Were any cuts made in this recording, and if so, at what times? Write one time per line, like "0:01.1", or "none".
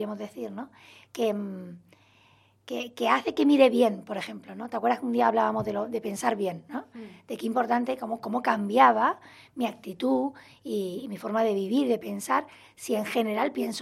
none